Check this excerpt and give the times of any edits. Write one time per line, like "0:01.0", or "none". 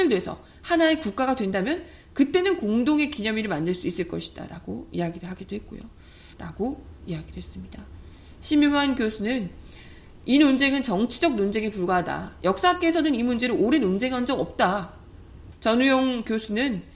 0:06.3
0:15.5